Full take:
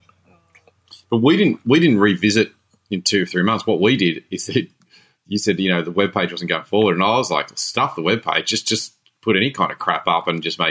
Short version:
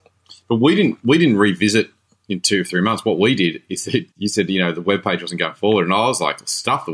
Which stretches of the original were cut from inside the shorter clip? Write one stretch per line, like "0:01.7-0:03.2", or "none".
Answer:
0:04.7-0:05.2